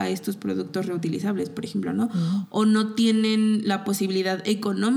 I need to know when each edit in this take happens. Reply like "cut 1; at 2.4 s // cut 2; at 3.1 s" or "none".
none